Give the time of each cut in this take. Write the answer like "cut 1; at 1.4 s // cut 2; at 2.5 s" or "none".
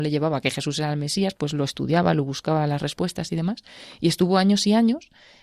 none